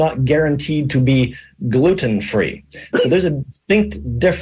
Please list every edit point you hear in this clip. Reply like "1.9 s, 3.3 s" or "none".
none